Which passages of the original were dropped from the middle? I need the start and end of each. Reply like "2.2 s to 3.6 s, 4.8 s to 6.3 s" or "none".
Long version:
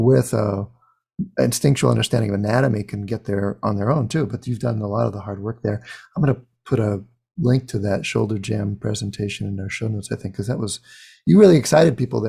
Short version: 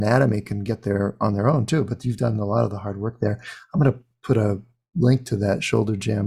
none